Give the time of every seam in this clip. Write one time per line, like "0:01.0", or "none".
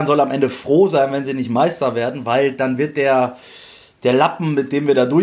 none